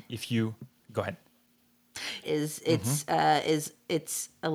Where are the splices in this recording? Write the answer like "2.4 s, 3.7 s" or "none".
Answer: 2.2 s